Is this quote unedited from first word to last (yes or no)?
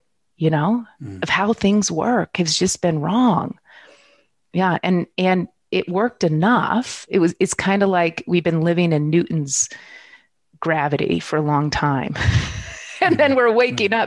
yes